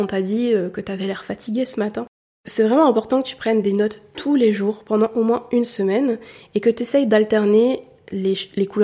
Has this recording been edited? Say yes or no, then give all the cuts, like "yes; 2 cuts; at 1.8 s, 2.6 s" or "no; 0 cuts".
no; 0 cuts